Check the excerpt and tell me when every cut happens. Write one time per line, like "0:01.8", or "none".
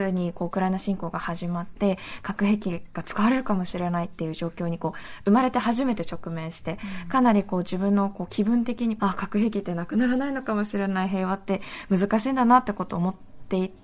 0:09.0